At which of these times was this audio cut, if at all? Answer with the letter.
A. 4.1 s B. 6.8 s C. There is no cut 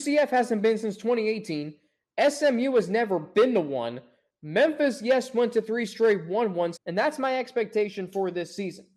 B